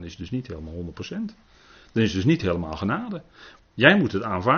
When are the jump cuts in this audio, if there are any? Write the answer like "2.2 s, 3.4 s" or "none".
3.6 s